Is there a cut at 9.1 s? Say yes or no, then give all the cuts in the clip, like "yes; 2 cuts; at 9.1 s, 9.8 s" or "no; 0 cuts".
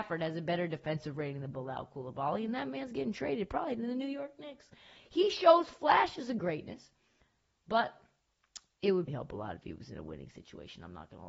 yes; 1 cut; at 9.1 s